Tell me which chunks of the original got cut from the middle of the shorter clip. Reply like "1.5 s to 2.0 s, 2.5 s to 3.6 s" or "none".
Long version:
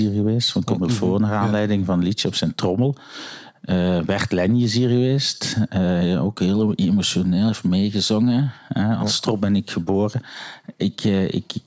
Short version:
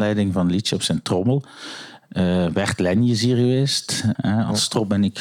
5.7 s to 8.7 s